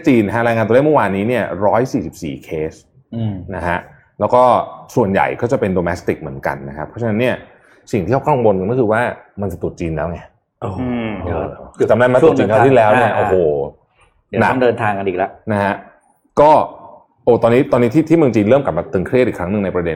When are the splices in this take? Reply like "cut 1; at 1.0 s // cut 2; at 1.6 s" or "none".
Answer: none